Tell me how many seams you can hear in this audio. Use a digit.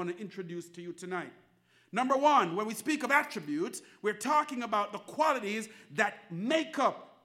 0